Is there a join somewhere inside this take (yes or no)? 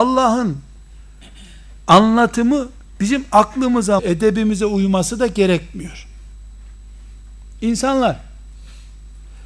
yes